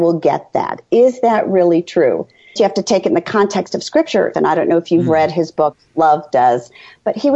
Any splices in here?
yes; 2 cuts; at 2.6 s, 4.3 s

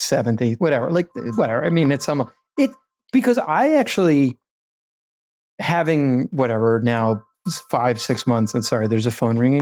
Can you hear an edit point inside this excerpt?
no; 0 cuts

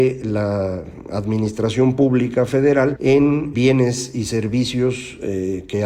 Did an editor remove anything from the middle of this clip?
yes; 1 cut; at 3.5 s

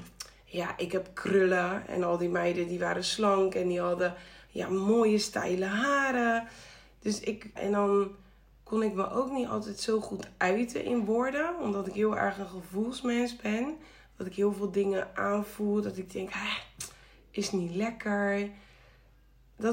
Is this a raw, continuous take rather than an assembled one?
no; 1 cut; at 7.6 s

